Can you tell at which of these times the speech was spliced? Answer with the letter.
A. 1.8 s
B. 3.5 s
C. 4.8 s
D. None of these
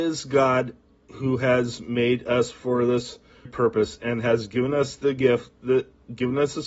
B